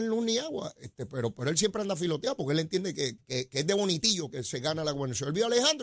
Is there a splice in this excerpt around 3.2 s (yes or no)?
yes